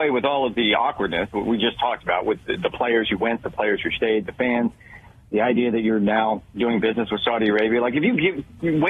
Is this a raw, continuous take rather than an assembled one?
yes; 0 cuts

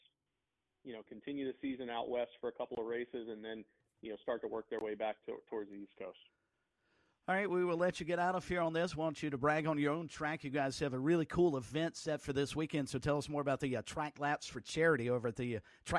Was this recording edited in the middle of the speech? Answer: no; 0 cuts

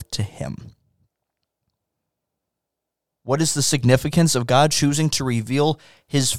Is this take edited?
yes; 1 cut; at 3.1 s

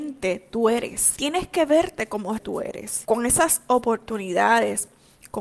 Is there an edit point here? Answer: yes; 1 cut; at 2.4 s

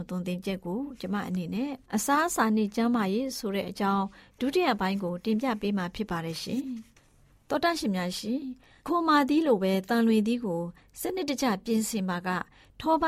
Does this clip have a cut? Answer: yes; 1 cut; at 1.9 s

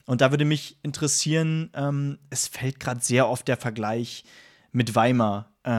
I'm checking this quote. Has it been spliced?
no; 0 cuts

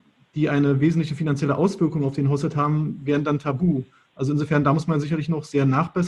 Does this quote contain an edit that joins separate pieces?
no; 0 cuts

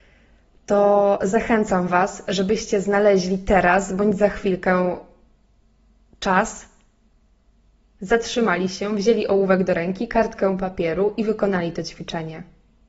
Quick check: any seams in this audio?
no; 0 cuts

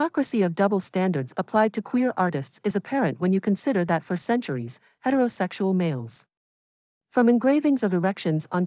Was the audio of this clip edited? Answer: yes; 1 cut; at 5.0 s

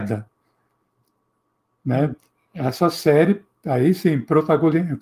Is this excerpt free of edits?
yes; 0 cuts

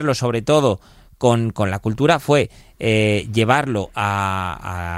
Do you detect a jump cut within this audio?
no; 0 cuts

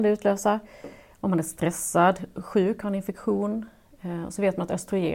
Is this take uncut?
yes; 0 cuts

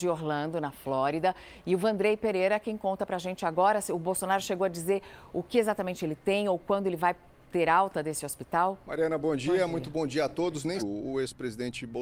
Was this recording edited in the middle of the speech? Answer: yes; 2 cuts; at 8.8 s, 10.8 s

